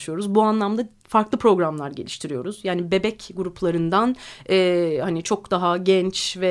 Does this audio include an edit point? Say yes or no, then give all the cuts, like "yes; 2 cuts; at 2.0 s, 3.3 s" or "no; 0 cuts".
no; 0 cuts